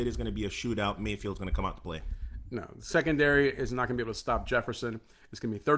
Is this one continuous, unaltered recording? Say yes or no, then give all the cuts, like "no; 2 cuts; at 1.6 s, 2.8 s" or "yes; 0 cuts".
yes; 0 cuts